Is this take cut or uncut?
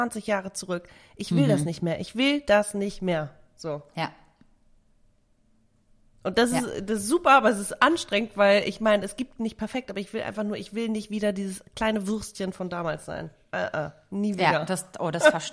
uncut